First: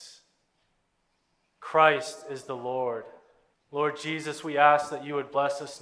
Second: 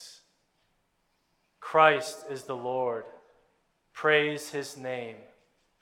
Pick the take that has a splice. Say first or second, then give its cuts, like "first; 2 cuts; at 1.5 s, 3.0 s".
first; 1 cut; at 3.5 s